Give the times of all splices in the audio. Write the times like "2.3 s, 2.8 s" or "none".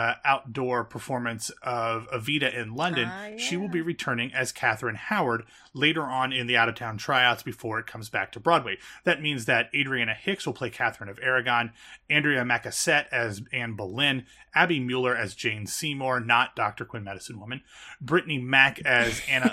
none